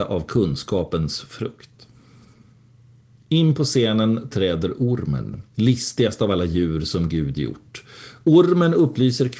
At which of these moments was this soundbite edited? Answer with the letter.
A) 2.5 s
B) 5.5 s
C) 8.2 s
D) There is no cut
B